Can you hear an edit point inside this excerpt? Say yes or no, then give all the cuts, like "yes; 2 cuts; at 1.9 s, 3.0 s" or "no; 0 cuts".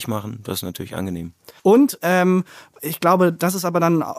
yes; 1 cut; at 1.6 s